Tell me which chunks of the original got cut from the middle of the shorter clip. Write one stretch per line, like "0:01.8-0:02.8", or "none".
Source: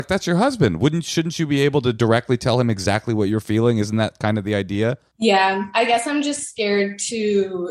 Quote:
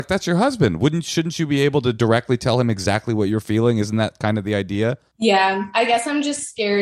none